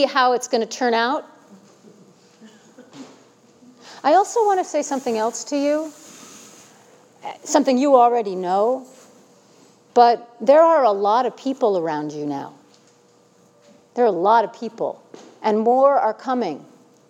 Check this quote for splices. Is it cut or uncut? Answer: uncut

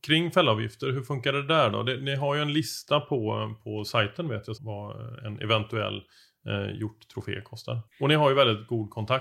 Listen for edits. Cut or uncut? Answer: cut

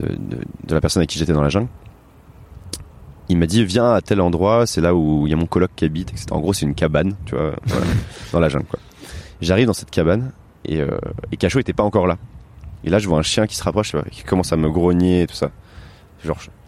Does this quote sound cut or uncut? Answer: cut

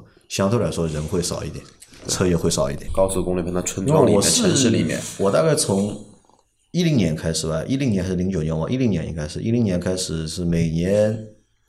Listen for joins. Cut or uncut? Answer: cut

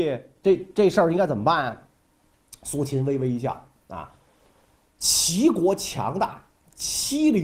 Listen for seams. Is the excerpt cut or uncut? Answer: uncut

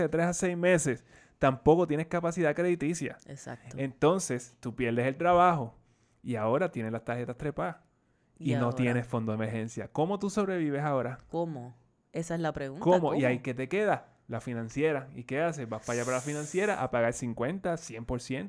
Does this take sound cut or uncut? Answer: uncut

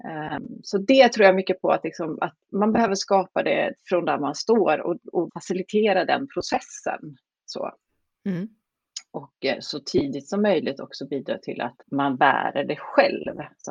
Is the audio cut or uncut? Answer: cut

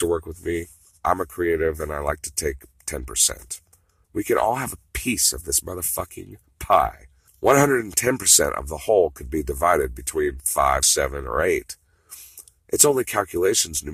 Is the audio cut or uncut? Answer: cut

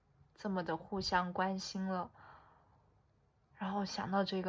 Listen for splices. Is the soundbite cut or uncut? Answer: uncut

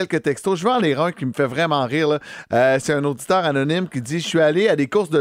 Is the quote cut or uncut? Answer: uncut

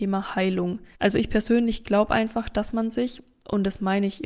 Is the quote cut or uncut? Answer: cut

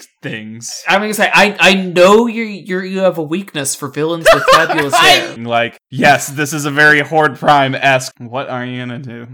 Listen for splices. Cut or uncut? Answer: cut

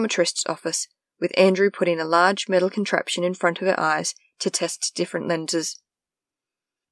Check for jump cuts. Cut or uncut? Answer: uncut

